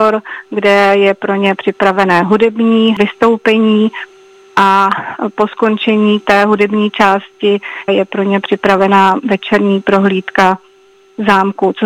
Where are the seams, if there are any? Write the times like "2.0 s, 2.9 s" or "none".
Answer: 7.9 s